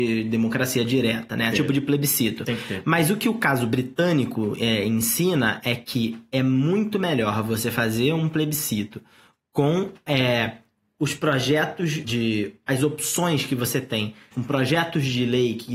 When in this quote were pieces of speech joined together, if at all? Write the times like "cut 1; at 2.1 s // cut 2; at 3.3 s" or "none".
cut 1; at 1.5 s // cut 2; at 12.0 s // cut 3; at 14.3 s